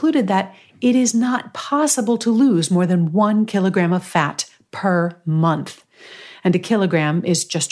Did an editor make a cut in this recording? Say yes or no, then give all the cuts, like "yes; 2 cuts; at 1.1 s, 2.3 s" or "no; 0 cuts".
no; 0 cuts